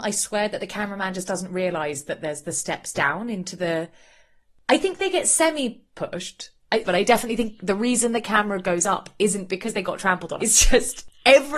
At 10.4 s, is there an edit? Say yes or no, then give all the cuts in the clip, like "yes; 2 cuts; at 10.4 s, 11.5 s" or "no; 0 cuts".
yes; 2 cuts; at 6.8 s, 10.4 s